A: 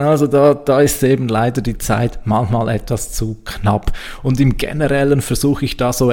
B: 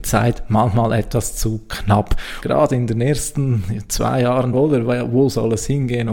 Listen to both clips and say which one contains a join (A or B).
B